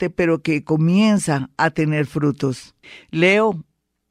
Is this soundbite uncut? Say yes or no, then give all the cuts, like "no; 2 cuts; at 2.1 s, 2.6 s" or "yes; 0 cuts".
yes; 0 cuts